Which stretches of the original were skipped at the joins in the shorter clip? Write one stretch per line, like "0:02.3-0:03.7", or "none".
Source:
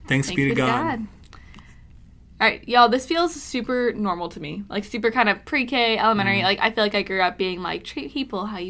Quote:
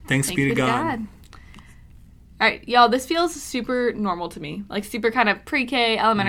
none